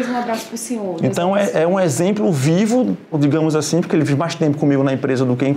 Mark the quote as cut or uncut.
cut